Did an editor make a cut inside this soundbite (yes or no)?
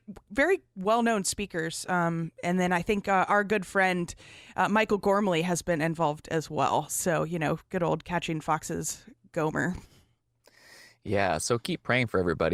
no